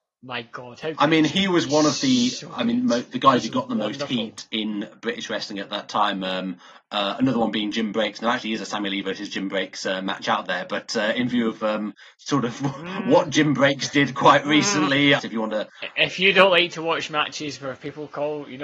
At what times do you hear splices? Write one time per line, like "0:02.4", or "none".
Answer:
0:15.2